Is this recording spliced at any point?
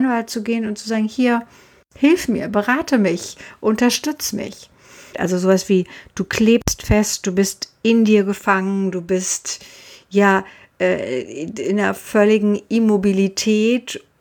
yes; 1 cut; at 5.1 s

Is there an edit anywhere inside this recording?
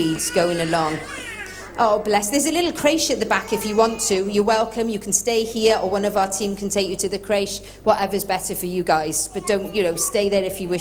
no; 0 cuts

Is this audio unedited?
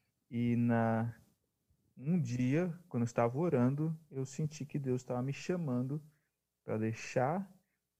yes; 0 cuts

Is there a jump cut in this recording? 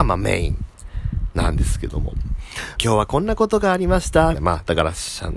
yes; 2 cuts; at 2.8 s, 4.3 s

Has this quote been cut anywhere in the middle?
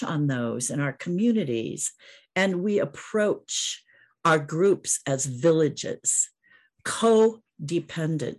no; 0 cuts

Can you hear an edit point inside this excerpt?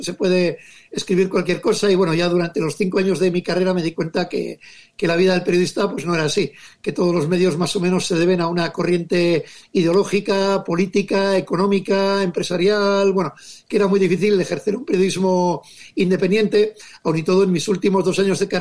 no; 0 cuts

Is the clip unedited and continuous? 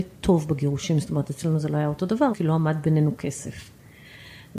no; 1 cut; at 2.3 s

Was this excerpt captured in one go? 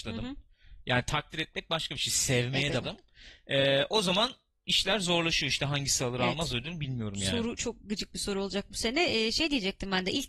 no; 1 cut; at 2.8 s

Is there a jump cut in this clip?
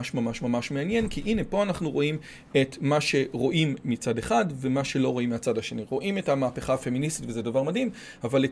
no; 0 cuts

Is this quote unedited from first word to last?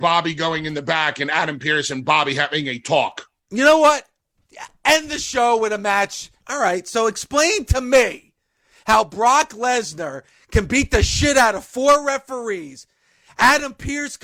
no; 1 cut; at 6.4 s

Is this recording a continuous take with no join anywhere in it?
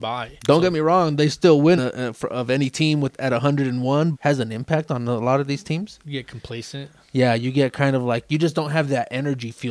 no; 2 cuts; at 1.8 s, 4.1 s

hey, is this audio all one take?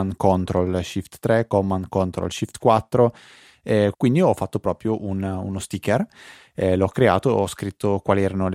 no; 1 cut; at 3.9 s

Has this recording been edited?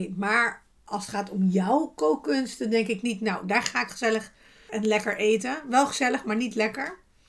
yes; 1 cut; at 4.7 s

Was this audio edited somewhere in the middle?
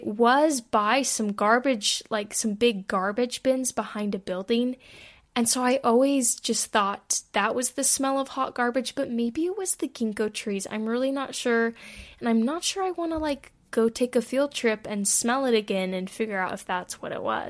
no; 0 cuts

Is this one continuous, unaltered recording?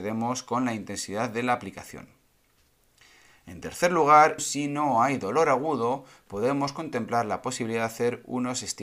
no; 1 cut; at 4.4 s

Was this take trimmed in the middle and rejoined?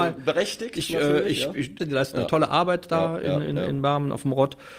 yes; 1 cut; at 1.8 s

